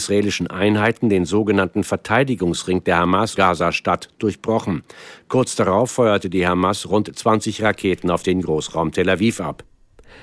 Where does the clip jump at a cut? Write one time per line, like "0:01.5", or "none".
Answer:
0:03.4